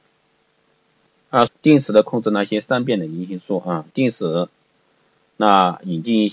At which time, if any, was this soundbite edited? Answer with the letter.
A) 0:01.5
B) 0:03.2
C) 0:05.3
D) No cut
A